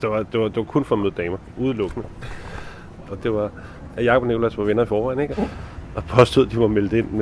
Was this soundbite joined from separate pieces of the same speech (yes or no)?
yes